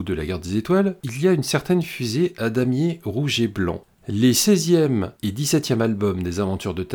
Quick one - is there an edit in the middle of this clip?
no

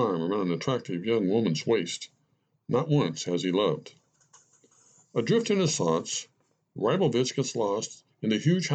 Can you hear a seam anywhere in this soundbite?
no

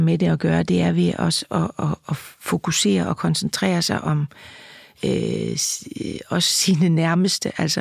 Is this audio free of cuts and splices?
yes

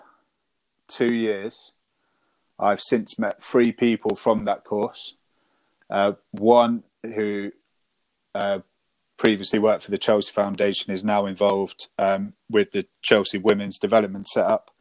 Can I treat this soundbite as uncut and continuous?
yes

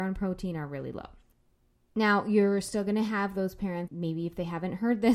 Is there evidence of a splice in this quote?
yes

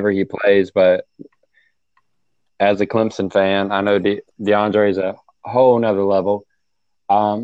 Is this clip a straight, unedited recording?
yes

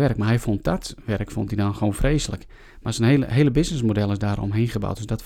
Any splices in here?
no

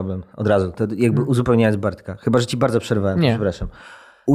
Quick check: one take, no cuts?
yes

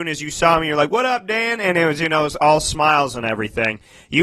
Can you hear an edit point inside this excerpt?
no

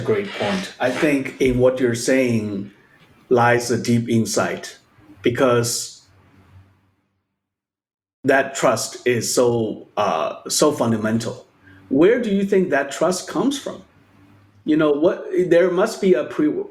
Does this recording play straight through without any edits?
no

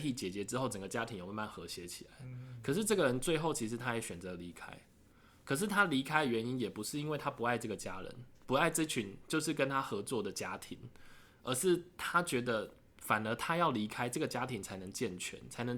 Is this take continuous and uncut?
yes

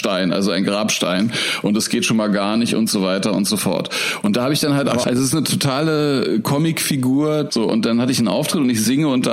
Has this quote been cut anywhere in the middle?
yes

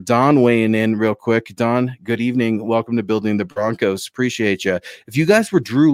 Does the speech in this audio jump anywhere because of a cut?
no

